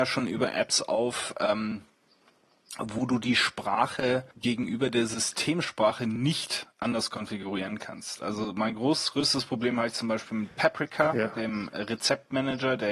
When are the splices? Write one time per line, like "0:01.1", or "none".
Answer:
0:04.3